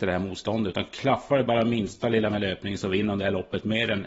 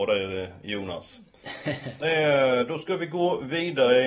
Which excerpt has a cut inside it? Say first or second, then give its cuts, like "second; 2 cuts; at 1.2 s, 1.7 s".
second; 1 cut; at 2.0 s